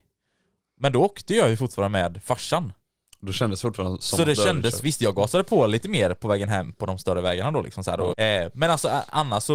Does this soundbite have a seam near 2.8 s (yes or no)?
no